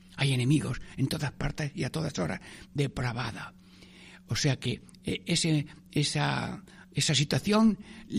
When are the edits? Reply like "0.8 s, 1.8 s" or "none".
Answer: 2.6 s